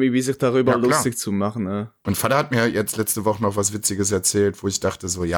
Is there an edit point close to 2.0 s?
yes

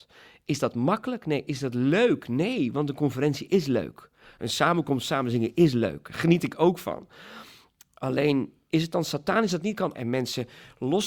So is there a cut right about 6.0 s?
no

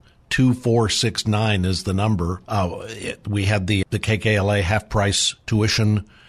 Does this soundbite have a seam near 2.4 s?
yes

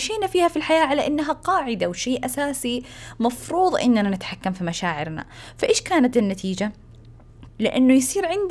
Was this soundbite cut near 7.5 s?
yes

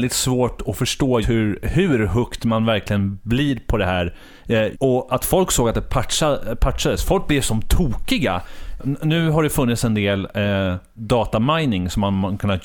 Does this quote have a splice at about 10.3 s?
no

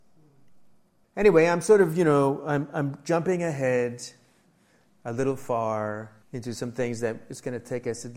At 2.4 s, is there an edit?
no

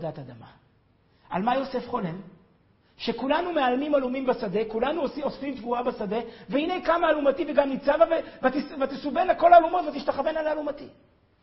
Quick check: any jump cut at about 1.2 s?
no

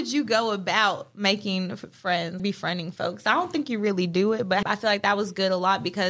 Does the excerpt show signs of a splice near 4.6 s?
yes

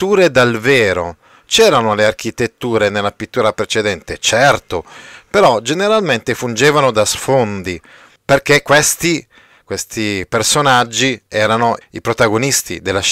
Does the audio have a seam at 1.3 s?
no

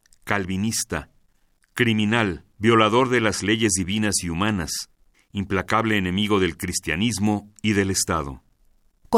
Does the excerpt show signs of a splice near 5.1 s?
yes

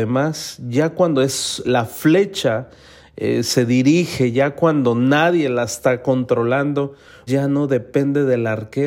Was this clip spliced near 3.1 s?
no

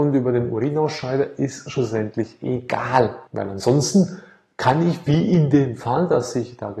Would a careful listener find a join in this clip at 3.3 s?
yes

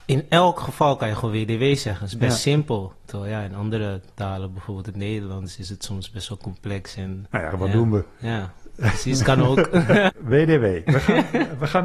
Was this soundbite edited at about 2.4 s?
no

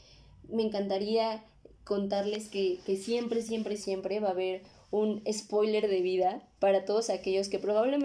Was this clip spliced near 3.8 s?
yes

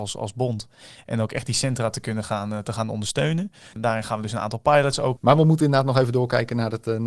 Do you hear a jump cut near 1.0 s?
no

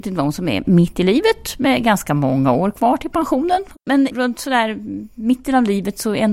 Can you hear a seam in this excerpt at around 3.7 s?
yes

